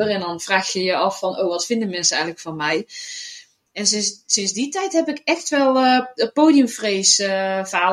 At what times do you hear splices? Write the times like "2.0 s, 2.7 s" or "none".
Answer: none